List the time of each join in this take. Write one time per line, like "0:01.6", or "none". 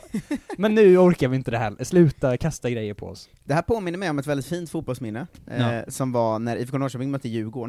none